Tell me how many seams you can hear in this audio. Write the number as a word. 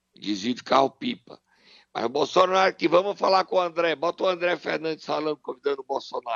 zero